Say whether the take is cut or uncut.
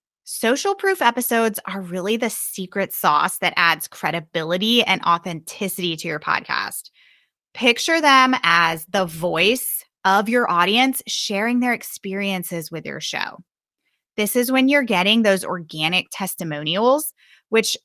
uncut